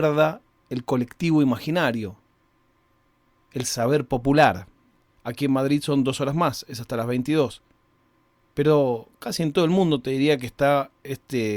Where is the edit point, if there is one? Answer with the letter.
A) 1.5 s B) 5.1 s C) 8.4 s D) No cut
B